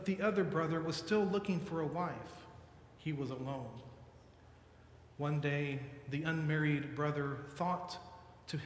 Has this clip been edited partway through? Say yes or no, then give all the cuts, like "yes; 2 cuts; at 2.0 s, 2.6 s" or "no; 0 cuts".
no; 0 cuts